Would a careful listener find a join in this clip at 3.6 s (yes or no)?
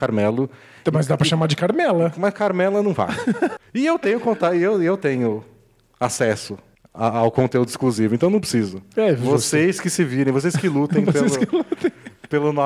yes